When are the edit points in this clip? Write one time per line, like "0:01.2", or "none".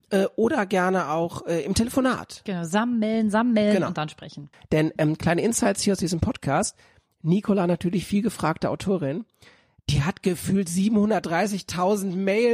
0:04.5